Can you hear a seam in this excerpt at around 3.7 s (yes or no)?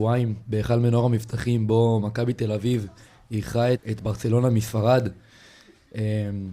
yes